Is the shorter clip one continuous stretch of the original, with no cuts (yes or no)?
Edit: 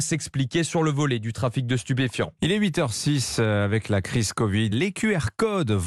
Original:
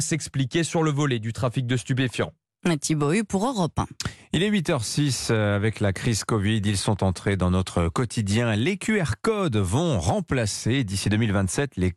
no